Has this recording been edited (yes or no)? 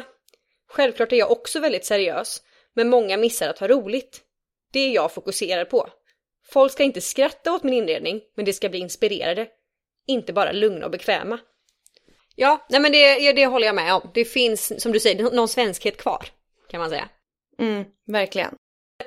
yes